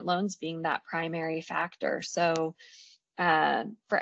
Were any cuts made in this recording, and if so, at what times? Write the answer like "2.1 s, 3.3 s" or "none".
none